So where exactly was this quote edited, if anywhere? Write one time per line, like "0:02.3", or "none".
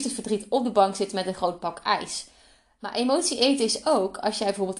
none